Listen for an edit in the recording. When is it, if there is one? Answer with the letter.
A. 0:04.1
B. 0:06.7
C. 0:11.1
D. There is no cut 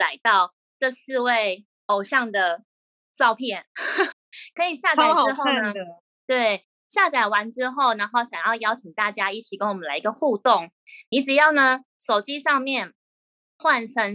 A